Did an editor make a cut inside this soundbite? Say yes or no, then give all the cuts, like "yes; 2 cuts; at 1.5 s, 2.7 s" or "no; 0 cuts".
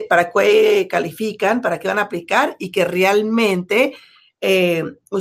no; 0 cuts